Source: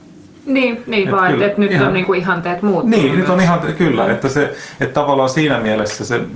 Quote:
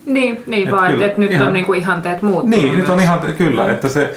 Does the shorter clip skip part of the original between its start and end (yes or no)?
no